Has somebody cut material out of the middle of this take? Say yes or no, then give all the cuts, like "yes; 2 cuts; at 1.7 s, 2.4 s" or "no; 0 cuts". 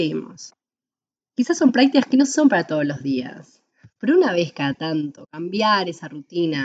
no; 0 cuts